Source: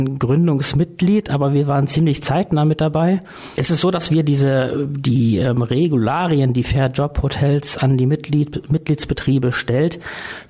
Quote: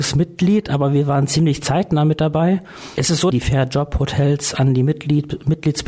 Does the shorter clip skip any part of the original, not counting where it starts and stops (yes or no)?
yes